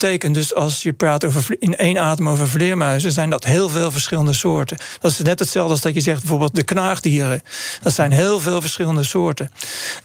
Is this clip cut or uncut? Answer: uncut